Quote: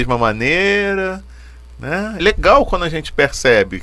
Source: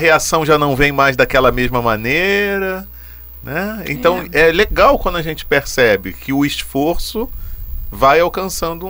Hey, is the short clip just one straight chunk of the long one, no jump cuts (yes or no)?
no